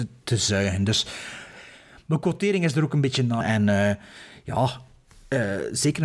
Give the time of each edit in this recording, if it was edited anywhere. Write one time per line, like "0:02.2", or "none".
0:03.4